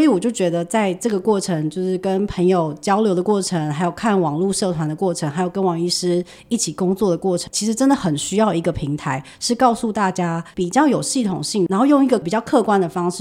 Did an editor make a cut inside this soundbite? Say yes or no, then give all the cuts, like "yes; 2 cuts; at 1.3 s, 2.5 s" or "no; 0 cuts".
yes; 2 cuts; at 7.5 s, 11.7 s